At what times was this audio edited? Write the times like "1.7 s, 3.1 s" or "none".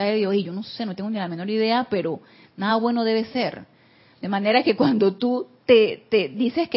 none